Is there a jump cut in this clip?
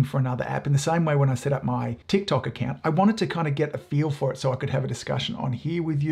yes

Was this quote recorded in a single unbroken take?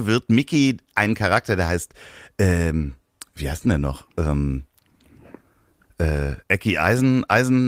yes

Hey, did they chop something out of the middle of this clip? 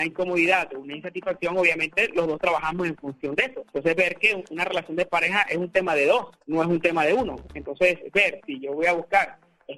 no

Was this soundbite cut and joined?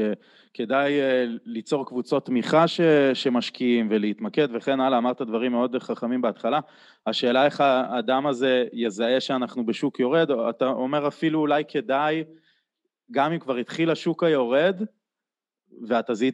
no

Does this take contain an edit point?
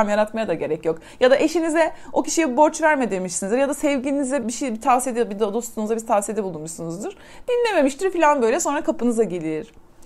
yes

